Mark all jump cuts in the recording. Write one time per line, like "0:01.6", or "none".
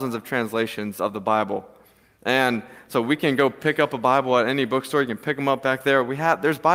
none